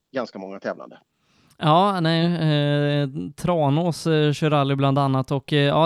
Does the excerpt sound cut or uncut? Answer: uncut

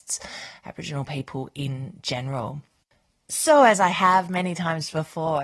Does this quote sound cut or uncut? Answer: uncut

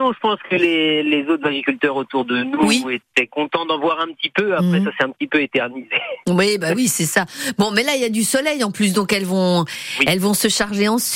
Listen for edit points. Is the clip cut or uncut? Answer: uncut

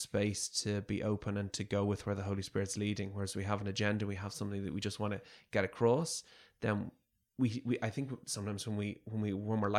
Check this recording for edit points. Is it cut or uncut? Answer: uncut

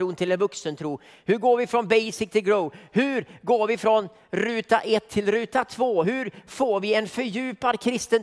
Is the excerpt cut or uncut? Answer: uncut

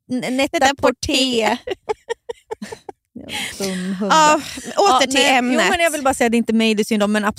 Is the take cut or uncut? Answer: uncut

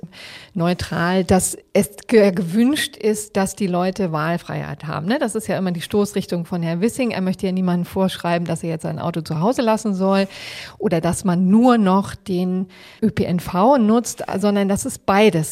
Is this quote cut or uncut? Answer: uncut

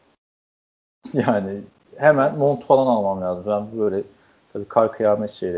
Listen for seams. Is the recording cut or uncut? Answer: uncut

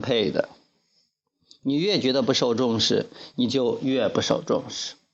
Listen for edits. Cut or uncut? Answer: uncut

